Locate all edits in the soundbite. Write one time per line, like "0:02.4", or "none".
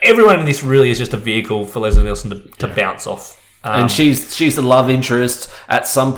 none